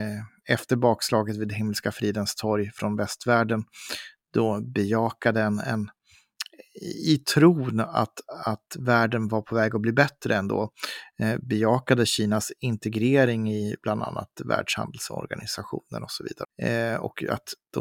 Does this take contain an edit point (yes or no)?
yes